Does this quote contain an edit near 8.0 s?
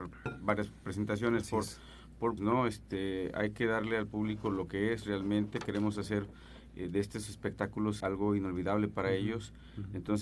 yes; 2 cuts; at 2.4 s, 8.0 s

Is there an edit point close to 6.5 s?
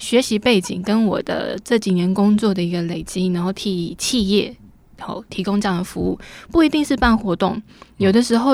no; 0 cuts

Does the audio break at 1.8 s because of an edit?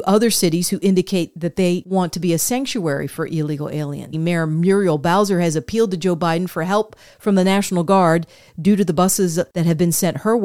no; 1 cut; at 4.1 s

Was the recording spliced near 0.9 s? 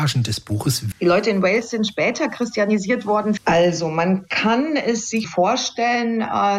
yes; 3 cuts; at 0.9 s, 3.4 s, 5.2 s

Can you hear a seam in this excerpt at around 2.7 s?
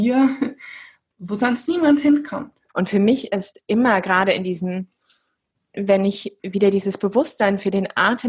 yes; 2 cuts; at 2.7 s, 5.7 s

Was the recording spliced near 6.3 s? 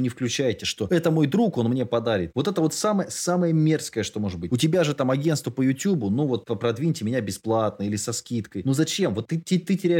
no; 1 cut; at 2.3 s

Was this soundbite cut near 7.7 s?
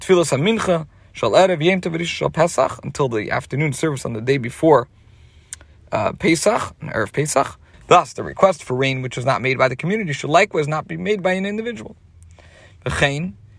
yes; 1 cut; at 7.7 s

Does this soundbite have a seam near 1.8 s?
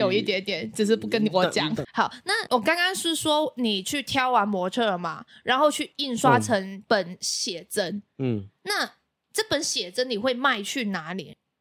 yes; 1 cut; at 1.8 s

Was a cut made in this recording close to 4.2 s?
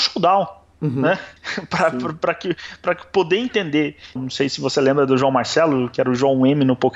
yes; 1 cut; at 4.2 s

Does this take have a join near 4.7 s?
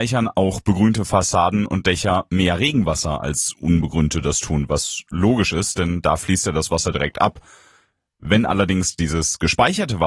no; 0 cuts

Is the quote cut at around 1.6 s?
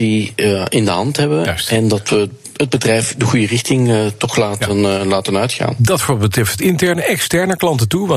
no; 0 cuts

